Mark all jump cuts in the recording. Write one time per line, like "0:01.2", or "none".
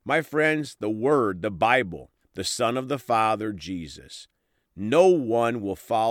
0:02.2